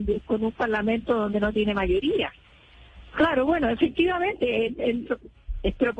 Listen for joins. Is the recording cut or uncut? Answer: cut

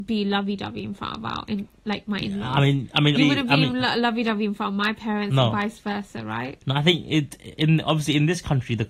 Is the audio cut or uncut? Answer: cut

